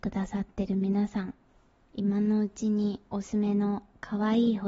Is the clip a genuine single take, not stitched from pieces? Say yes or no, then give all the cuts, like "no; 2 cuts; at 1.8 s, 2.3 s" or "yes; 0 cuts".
no; 1 cut; at 3.2 s